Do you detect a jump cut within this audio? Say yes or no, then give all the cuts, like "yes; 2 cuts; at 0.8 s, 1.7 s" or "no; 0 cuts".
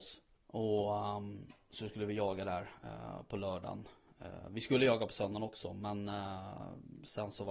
no; 0 cuts